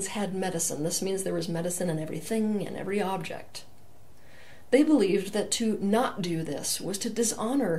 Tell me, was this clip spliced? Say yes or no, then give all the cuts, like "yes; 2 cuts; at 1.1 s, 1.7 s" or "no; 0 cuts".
no; 0 cuts